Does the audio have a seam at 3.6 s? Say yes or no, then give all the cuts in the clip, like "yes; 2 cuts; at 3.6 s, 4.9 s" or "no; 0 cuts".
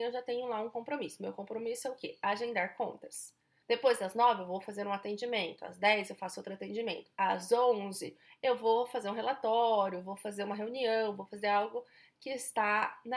yes; 1 cut; at 3.6 s